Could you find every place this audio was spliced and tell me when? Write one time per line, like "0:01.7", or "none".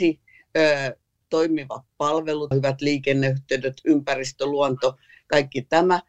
0:02.5